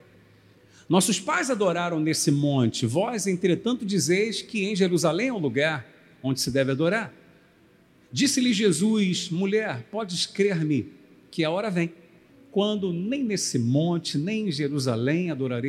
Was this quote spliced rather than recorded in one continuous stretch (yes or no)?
no